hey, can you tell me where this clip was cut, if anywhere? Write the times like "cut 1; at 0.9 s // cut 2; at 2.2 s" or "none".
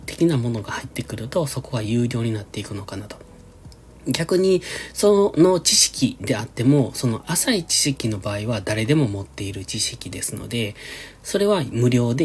none